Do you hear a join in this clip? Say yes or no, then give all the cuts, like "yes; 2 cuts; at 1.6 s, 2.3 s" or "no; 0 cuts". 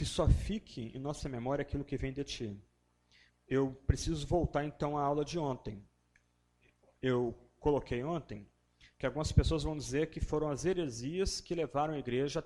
yes; 1 cut; at 3.3 s